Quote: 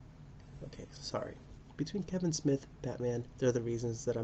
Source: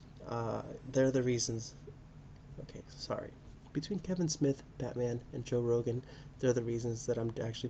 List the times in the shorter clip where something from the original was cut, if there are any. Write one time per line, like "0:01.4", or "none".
0:03.3